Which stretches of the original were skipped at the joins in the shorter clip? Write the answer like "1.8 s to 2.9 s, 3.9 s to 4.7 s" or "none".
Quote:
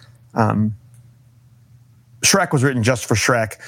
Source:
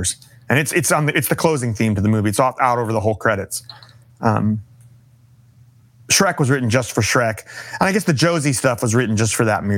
none